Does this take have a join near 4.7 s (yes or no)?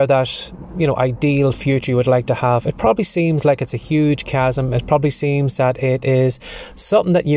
no